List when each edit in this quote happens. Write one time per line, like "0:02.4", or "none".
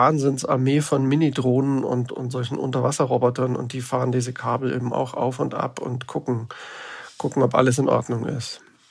0:02.1

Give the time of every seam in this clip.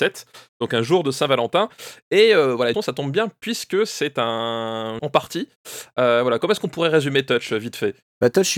0:02.7
0:05.0

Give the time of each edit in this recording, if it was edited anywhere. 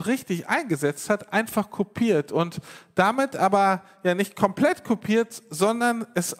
none

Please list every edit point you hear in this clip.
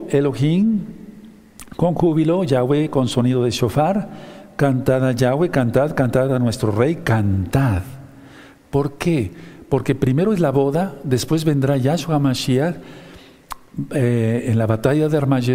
0:08.6

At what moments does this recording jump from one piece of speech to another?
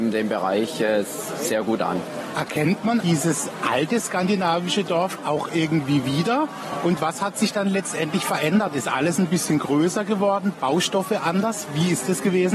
0:03.0
0:10.5

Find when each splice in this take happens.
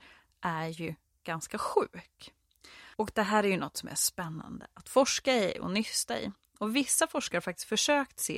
none

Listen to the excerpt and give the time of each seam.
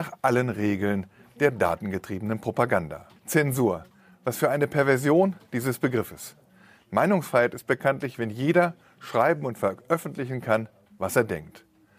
0:03.2

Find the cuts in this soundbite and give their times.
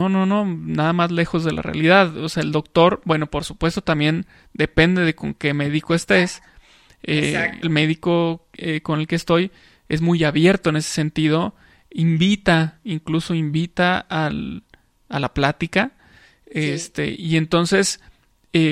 0:07.6

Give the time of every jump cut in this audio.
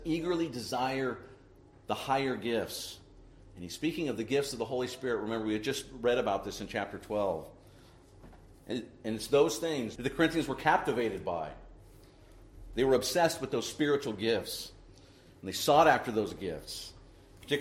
0:10.0

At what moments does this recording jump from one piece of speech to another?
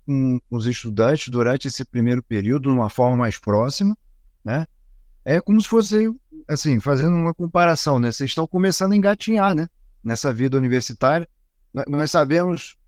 none

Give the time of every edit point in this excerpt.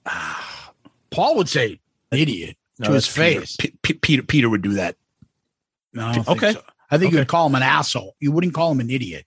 0:02.1

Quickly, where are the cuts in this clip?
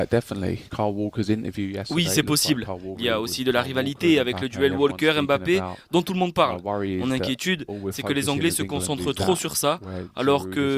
0:02.9

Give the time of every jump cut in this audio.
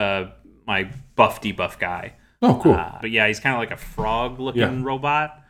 0:03.0

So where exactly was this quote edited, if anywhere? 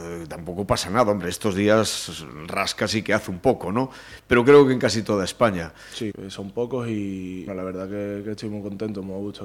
0:06.1
0:07.5

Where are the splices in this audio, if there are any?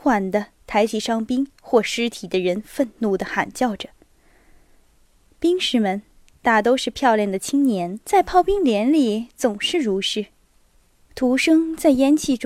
0:08.0
0:11.0

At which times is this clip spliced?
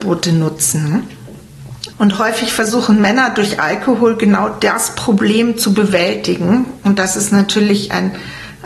0:01.9

